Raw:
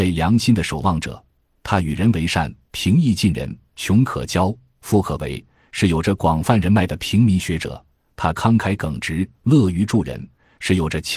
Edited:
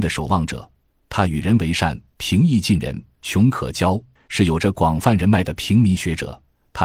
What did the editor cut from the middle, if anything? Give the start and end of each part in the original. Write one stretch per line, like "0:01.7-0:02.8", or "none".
0:04.7-0:05.6